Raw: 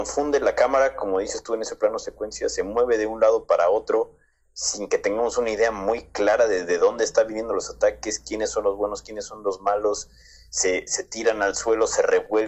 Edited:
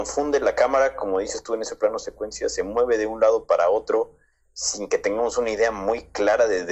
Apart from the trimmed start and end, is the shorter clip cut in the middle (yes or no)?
no